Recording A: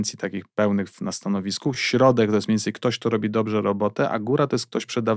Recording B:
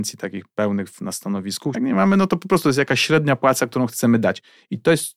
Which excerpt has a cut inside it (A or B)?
B